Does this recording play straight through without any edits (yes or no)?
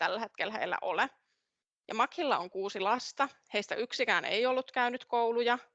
yes